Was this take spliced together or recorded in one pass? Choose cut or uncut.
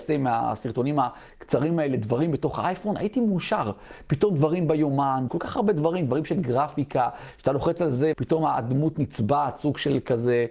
cut